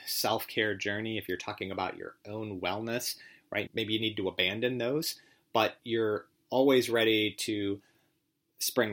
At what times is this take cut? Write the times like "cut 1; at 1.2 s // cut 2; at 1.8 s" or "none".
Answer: cut 1; at 3.7 s